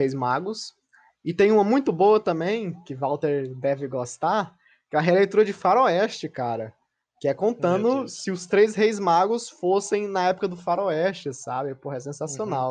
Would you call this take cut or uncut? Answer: uncut